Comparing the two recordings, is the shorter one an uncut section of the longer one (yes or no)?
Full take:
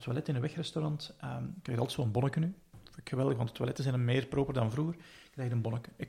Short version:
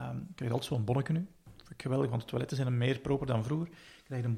yes